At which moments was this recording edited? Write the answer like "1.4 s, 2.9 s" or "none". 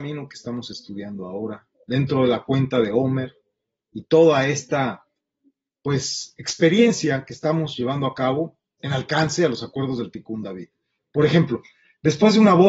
8.8 s, 11.0 s

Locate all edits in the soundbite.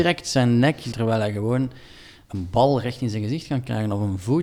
0.9 s

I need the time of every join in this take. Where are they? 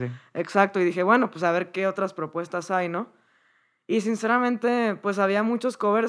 none

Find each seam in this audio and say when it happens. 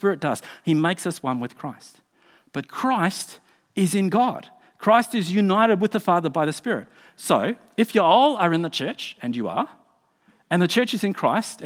none

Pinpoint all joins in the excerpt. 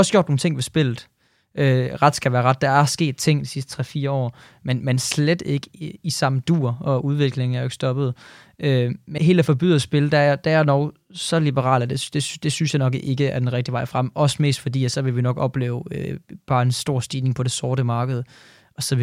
9.2 s

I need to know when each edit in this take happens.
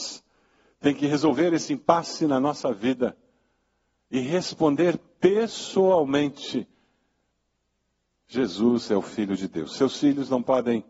none

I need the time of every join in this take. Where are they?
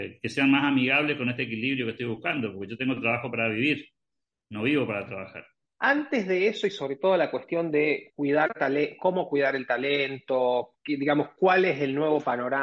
5.7 s

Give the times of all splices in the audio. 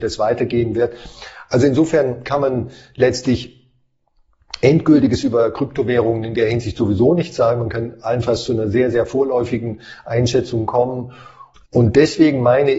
11.5 s

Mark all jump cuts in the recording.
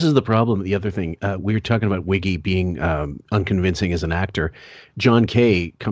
none

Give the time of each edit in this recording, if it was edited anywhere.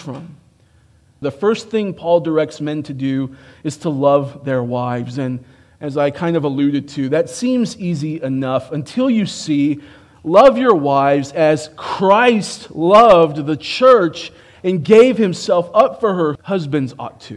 1.2 s, 16.4 s

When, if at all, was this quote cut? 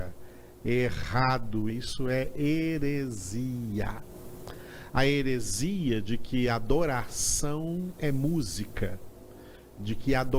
1.7 s, 4.9 s

